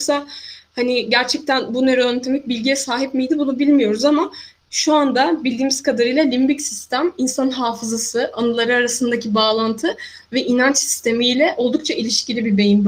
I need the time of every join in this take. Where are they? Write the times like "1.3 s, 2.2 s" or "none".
none